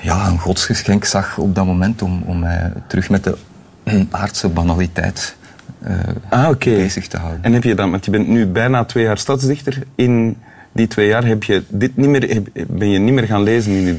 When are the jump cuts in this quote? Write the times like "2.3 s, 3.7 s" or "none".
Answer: none